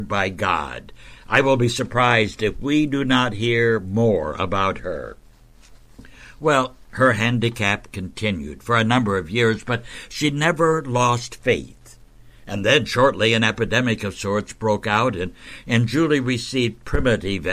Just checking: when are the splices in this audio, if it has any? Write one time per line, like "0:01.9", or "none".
none